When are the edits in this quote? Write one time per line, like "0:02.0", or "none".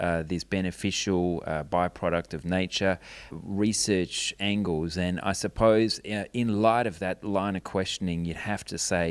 0:03.3